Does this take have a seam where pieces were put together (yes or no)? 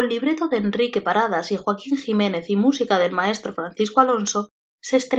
no